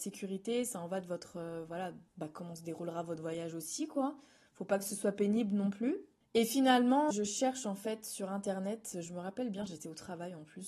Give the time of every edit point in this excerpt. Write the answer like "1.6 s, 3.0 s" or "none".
7.1 s